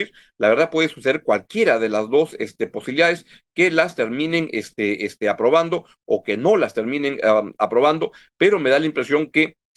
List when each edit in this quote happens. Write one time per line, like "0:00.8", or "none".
none